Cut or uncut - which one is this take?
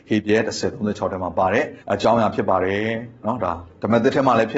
cut